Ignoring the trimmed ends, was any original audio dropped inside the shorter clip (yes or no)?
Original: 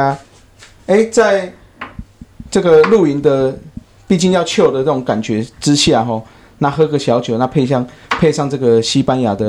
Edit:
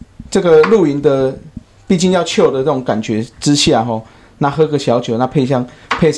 no